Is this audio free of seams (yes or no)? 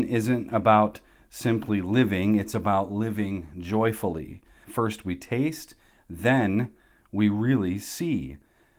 no